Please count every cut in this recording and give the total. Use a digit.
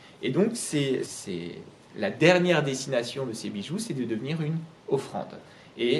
1